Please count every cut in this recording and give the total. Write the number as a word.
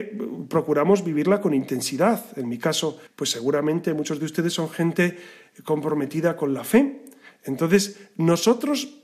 one